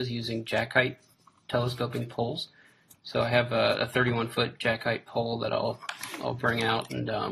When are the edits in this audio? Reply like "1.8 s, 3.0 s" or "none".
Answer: none